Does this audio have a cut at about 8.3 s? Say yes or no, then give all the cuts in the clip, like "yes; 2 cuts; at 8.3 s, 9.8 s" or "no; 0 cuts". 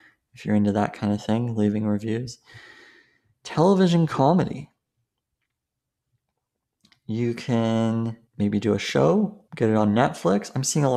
yes; 2 cuts; at 8.3 s, 9.5 s